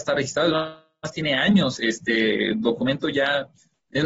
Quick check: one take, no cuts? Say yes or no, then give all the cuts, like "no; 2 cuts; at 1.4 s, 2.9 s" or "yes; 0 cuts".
no; 1 cut; at 1.8 s